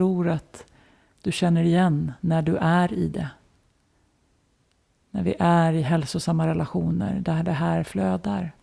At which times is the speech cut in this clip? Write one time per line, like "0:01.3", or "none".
none